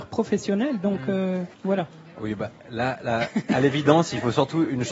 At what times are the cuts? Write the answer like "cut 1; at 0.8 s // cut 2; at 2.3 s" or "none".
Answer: cut 1; at 1.5 s